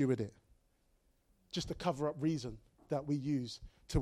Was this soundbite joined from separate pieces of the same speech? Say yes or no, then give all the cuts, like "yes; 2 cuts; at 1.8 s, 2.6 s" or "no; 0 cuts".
no; 0 cuts